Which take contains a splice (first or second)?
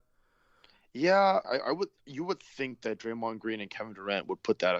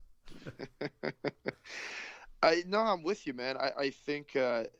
first